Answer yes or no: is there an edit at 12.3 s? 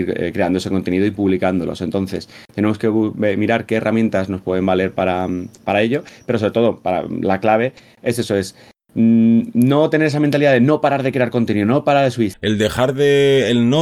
yes